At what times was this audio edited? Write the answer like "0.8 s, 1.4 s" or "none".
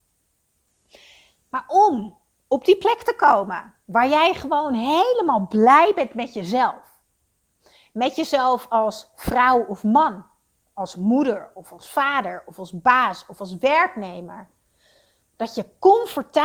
none